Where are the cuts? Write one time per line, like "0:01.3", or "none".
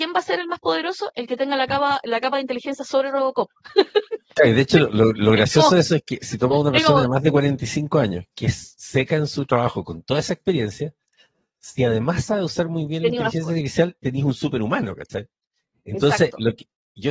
none